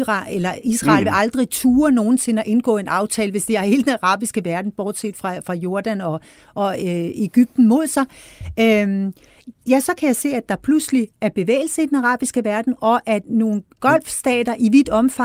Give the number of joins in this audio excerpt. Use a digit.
0